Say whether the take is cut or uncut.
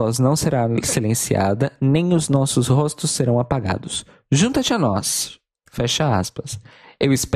uncut